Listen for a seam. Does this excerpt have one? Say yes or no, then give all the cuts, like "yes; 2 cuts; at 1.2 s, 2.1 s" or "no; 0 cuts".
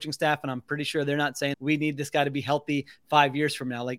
yes; 1 cut; at 1.5 s